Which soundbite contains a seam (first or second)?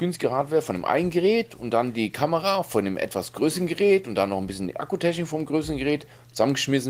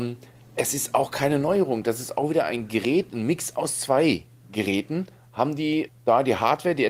second